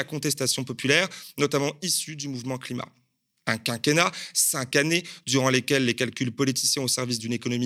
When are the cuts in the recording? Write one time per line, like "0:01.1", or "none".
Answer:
0:03.4